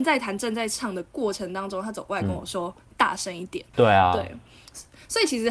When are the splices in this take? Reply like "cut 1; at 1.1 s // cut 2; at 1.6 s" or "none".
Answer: cut 1; at 3.7 s